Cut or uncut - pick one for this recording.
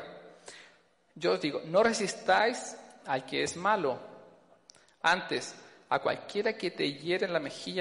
uncut